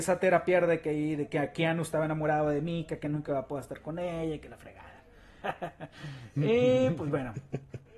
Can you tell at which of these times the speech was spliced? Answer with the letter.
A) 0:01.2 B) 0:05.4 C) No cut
B